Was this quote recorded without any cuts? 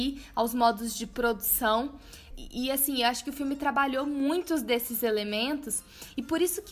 no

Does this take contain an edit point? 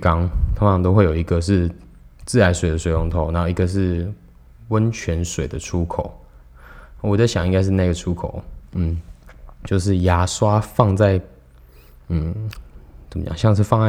yes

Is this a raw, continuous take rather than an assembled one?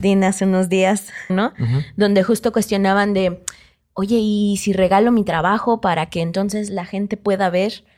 no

